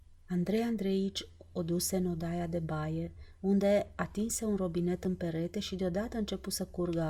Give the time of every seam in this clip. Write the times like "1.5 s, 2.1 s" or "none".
none